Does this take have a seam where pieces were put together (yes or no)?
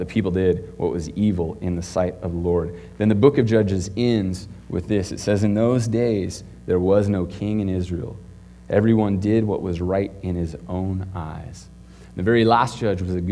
no